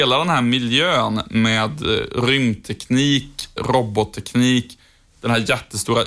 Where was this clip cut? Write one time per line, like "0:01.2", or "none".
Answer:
0:03.6
0:05.1

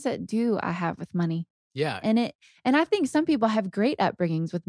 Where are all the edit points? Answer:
0:02.0

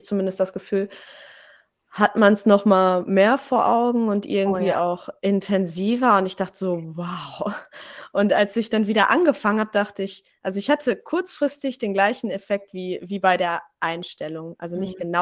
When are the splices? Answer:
none

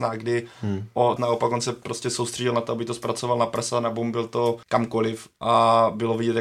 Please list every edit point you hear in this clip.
0:01.2
0:04.6

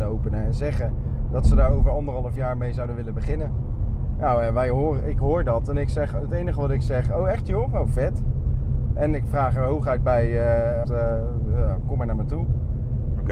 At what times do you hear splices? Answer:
0:08.9
0:10.8

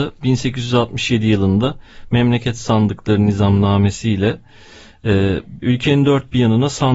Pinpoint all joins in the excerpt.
0:05.6

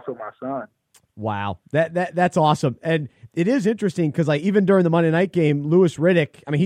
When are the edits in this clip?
none

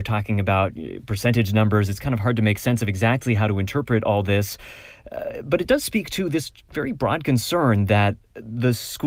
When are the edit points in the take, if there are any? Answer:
none

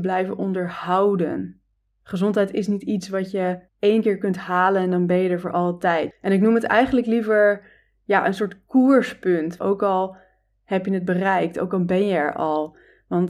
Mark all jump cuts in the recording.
0:03.7
0:06.1
0:09.6

